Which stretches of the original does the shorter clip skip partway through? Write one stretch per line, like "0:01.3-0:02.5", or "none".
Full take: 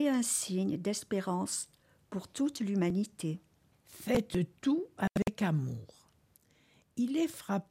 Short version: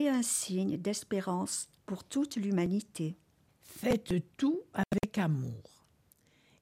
0:01.8-0:02.0